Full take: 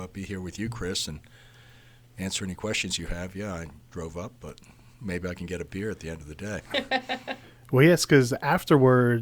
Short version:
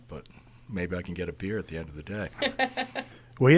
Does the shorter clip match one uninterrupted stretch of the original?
yes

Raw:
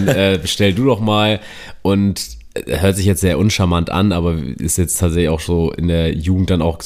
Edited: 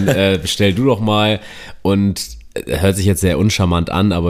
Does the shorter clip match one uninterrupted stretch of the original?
yes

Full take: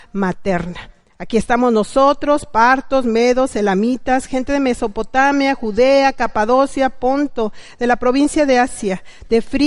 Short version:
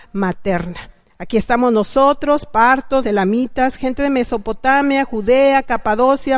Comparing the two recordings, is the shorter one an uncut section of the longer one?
no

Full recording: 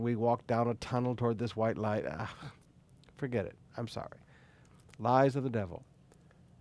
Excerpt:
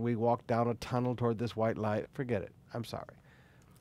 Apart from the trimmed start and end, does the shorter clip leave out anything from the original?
yes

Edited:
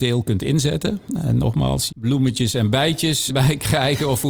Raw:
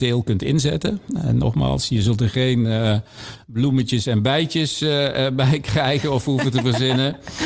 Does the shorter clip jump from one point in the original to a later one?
yes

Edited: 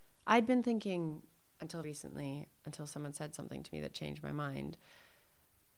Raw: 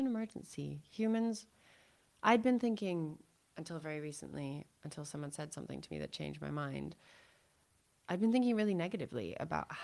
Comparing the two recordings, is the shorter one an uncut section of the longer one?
no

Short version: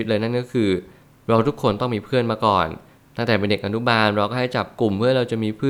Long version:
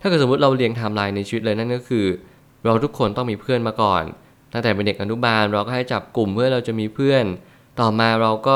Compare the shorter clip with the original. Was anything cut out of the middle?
no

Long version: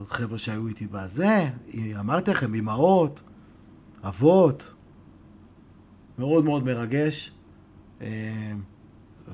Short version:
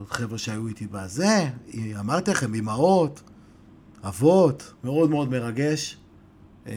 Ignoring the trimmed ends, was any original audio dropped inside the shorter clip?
yes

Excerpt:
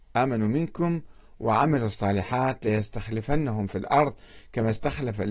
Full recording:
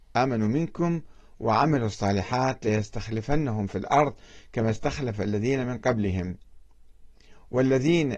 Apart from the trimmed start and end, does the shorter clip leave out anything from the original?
no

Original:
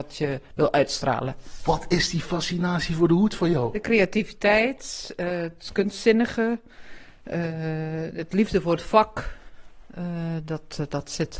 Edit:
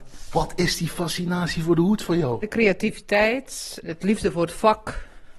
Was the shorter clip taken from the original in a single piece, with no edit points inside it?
no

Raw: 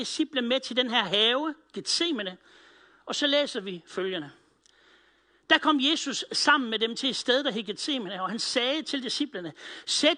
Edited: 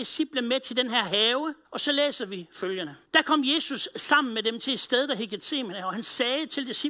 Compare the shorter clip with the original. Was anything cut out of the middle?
yes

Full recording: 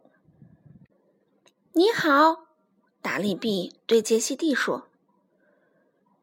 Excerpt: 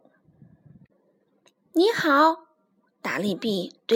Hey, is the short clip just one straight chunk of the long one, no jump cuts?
yes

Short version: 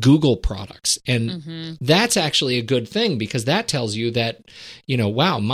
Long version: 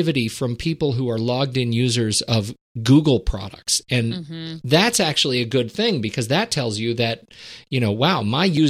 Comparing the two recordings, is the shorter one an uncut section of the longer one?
yes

